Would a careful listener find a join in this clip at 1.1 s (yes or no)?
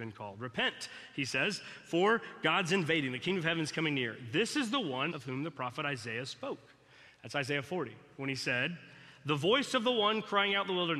no